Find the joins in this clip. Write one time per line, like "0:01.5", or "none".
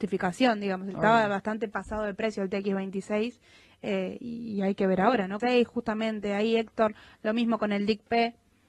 0:05.4